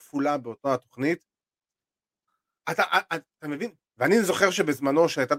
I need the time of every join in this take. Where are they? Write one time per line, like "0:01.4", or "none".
0:02.3
0:03.8